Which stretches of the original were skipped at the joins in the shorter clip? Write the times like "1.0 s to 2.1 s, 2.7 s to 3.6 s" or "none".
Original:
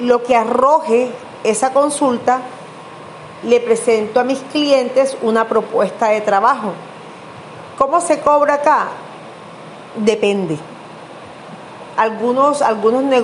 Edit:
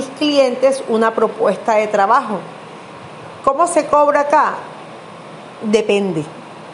none